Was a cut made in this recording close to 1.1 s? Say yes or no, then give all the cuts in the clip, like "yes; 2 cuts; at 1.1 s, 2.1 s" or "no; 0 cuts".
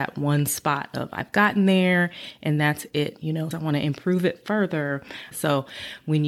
no; 2 cuts; at 3.5 s, 5.3 s